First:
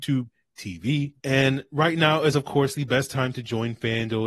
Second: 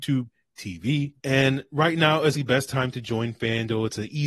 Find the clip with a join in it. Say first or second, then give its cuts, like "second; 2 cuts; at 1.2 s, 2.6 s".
second; 1 cut; at 2.3 s